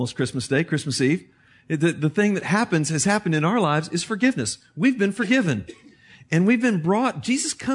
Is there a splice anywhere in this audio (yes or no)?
no